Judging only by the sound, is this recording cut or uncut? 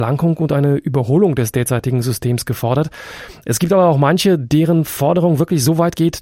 uncut